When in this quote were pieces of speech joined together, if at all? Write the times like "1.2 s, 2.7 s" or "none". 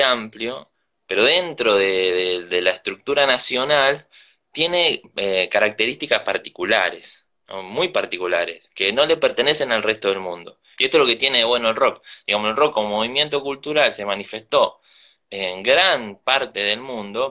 none